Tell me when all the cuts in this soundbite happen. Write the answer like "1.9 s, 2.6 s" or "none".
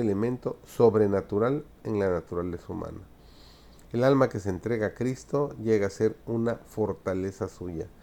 none